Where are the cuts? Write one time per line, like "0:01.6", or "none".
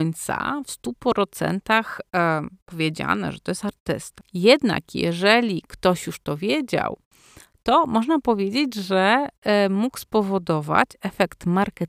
none